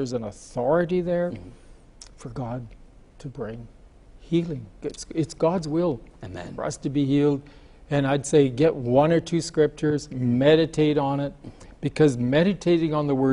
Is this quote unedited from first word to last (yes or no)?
yes